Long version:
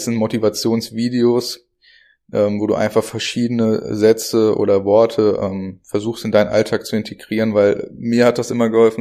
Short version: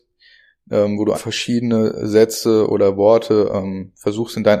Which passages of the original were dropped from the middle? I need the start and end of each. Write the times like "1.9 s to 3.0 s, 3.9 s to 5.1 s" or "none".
2.8 s to 3.0 s